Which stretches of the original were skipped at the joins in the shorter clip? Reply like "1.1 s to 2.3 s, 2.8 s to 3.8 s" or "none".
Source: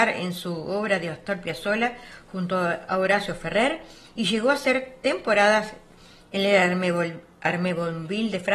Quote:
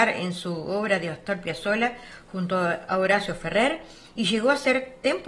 none